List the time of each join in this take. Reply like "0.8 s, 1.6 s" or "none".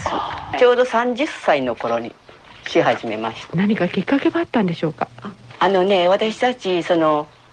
3.5 s